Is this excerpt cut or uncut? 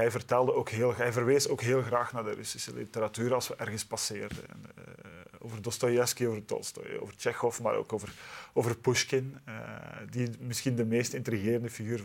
uncut